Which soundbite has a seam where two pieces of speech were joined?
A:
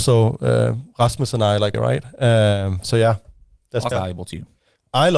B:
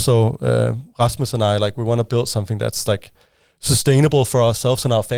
A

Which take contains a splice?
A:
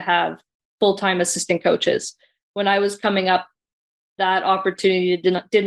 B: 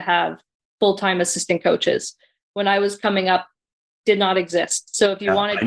B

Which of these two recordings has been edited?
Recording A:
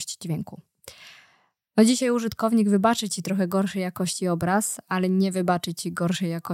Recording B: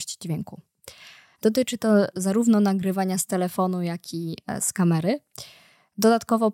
B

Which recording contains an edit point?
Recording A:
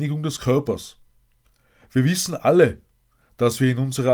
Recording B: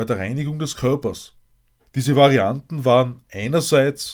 B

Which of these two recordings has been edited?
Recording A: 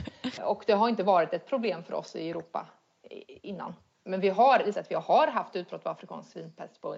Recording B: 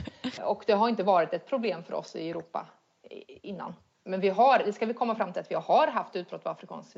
A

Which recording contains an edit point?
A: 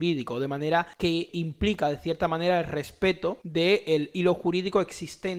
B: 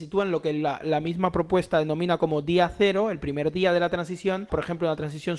B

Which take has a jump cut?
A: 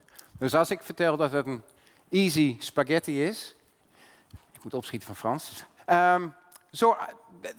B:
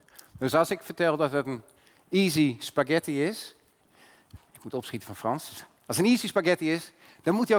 A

